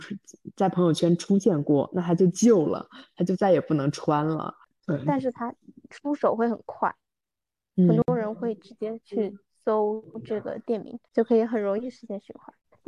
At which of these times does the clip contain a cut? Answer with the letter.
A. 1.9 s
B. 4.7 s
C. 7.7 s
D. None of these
B